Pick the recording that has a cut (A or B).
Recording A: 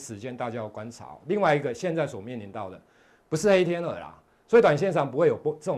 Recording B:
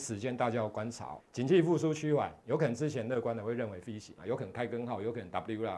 B